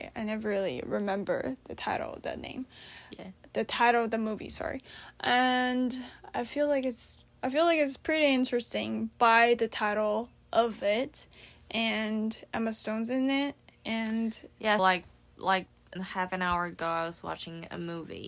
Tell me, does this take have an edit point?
yes; 3 cuts; at 7.4 s, 14.8 s, 16.0 s

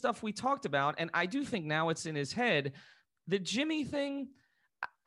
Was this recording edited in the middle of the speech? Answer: no; 0 cuts

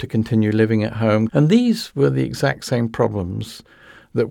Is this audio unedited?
no; 1 cut; at 1.3 s

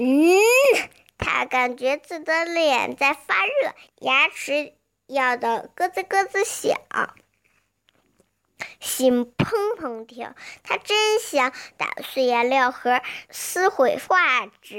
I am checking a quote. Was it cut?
yes; 2 cuts; at 1.1 s, 3.9 s

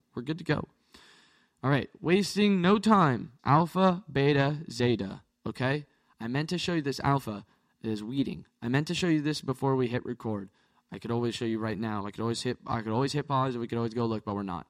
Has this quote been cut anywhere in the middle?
yes; 1 cut; at 3.4 s

